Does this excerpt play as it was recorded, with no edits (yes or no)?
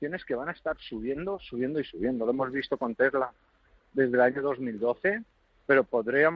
yes